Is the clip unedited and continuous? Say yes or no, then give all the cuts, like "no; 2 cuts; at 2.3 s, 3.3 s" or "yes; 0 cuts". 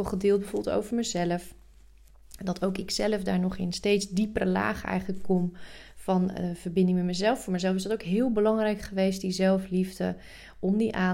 yes; 0 cuts